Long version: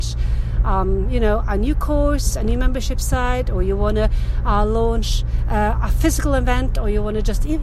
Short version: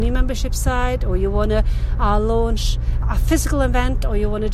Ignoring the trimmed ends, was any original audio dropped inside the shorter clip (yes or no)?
yes